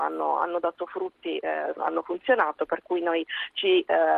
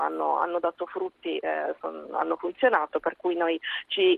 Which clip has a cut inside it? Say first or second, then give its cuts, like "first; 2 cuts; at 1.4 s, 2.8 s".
first; 1 cut; at 1.8 s